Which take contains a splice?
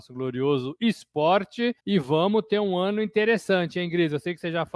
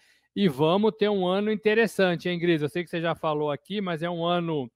first; 1 cut; at 1.8 s

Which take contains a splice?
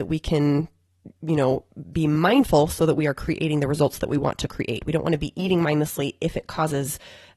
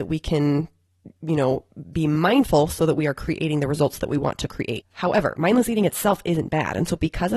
second; 1 cut; at 4.8 s

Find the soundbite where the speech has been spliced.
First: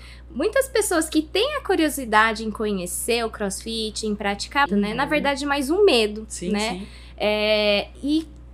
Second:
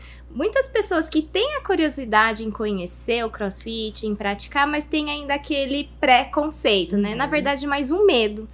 first; 1 cut; at 4.7 s

